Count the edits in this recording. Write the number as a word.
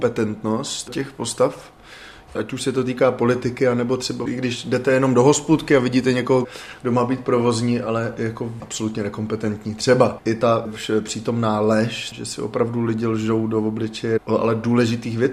zero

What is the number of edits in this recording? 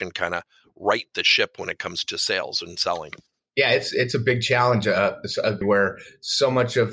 one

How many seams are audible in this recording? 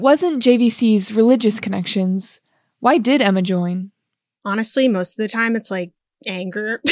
zero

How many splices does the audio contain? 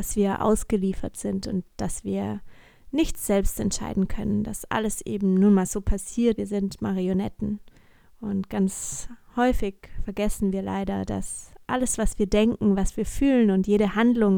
one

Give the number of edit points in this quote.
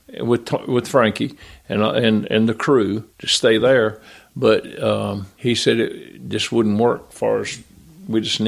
two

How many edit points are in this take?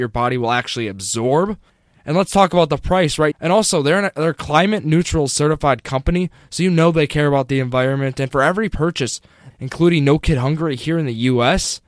two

